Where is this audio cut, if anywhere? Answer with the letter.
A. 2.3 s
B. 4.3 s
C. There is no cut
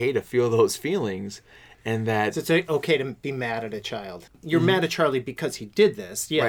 B